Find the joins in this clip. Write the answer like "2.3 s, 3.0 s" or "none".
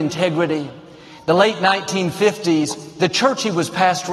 none